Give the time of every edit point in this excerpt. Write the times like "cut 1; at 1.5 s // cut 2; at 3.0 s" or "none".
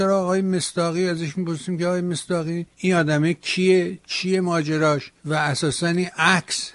cut 1; at 2.7 s // cut 2; at 5.2 s